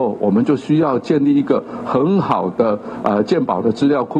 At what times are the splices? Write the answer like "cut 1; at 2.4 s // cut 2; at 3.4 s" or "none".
none